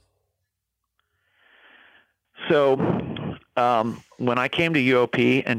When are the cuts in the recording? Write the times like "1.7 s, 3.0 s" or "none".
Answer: none